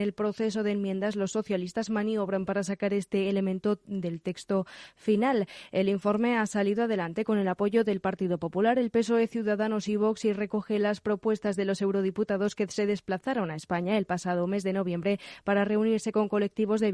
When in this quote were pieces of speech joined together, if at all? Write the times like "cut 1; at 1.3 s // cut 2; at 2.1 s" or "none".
none